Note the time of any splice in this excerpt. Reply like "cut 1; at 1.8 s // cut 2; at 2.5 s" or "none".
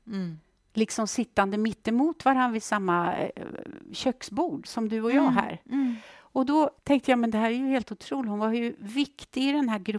cut 1; at 4.6 s // cut 2; at 6.8 s

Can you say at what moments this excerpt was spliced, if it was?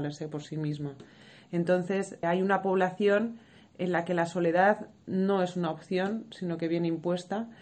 cut 1; at 2.2 s

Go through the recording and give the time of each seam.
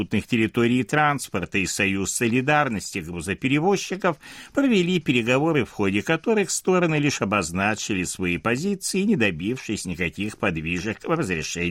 none

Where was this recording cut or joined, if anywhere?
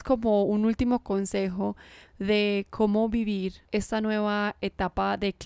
none

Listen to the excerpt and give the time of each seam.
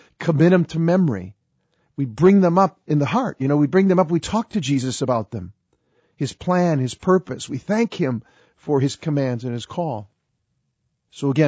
none

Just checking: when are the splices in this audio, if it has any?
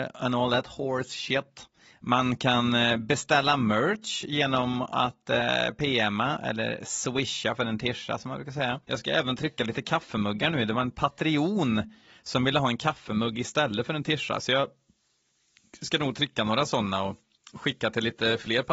cut 1; at 8.8 s

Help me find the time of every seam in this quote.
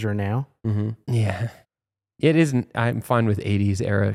cut 1; at 1.0 s

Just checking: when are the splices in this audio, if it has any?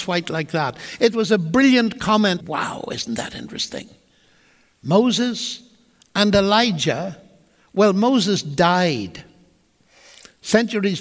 cut 1; at 2.4 s

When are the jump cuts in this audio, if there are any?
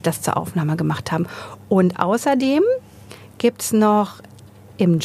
none

